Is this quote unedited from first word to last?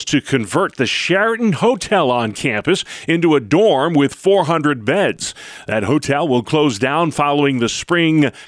yes; 0 cuts

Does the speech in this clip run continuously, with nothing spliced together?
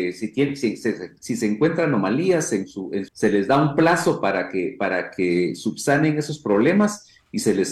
no; 1 cut; at 3.1 s

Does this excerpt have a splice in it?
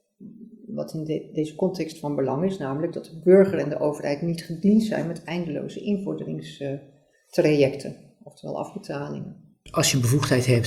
no; 0 cuts

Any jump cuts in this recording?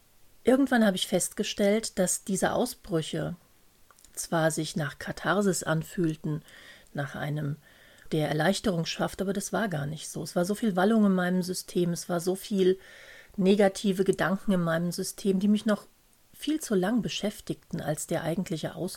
yes; 1 cut; at 8.1 s

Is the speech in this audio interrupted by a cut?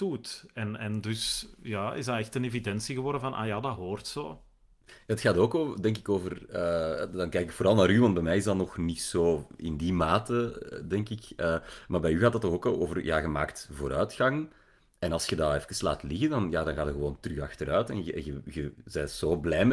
no; 0 cuts

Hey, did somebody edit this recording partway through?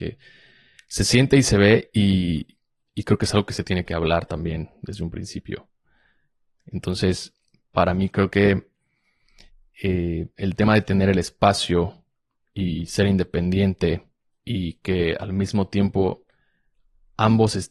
no; 0 cuts

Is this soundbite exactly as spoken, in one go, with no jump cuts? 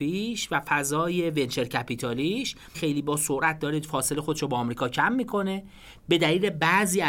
no; 1 cut; at 2.7 s

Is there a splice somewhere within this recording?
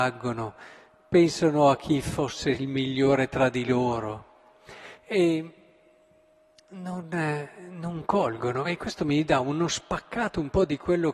no; 0 cuts

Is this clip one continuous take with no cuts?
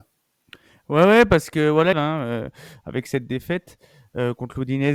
no; 1 cut; at 1.9 s

